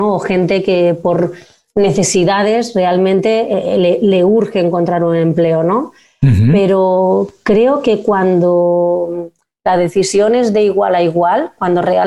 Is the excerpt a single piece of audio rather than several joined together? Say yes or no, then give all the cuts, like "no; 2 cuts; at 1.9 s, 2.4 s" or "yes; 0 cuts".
yes; 0 cuts